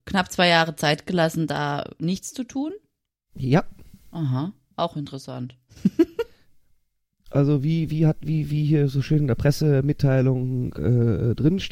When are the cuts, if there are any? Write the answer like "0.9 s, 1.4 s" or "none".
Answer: none